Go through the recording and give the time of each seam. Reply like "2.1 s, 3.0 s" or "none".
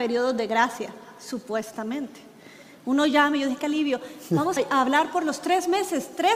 4.6 s